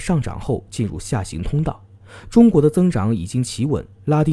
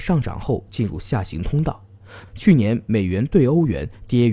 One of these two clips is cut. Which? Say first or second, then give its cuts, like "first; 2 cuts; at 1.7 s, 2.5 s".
second; 1 cut; at 2.2 s